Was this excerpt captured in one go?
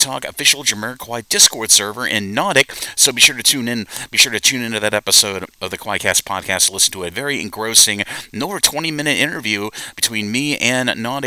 yes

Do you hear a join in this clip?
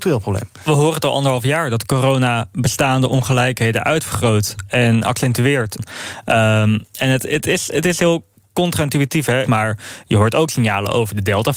yes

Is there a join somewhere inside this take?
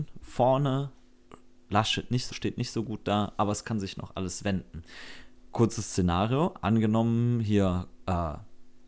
yes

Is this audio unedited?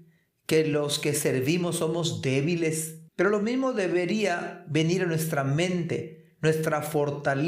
no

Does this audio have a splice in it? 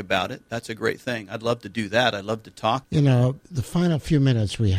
yes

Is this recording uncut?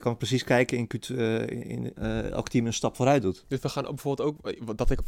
no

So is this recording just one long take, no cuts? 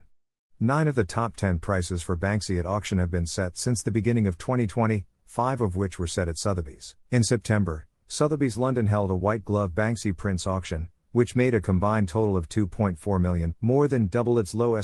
no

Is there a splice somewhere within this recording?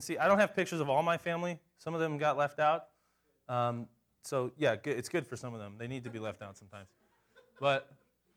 no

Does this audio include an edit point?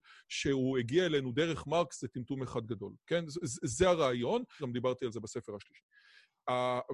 yes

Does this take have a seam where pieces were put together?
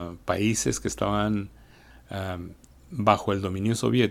no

